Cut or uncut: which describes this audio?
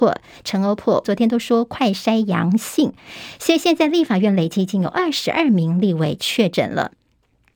cut